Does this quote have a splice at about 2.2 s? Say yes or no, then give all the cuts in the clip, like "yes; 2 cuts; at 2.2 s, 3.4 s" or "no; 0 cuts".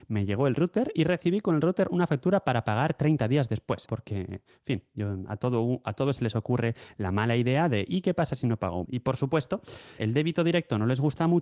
no; 3 cuts; at 3.9 s, 8.8 s, 10.0 s